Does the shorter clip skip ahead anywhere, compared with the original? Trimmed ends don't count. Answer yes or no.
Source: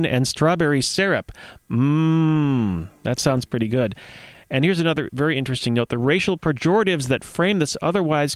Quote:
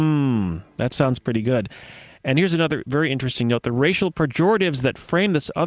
no